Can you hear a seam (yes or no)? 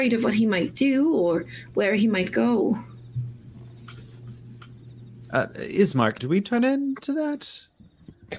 yes